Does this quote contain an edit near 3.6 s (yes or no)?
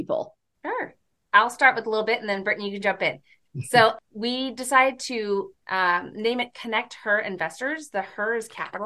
no